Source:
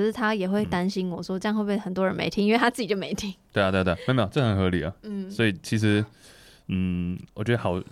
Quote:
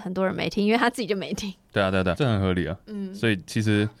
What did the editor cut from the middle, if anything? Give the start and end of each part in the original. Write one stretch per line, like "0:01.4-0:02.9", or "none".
0:04.0-0:04.3